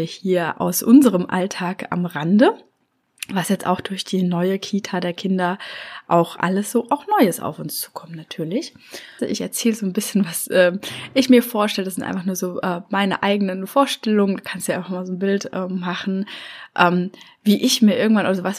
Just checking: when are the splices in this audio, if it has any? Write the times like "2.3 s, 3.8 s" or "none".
9.2 s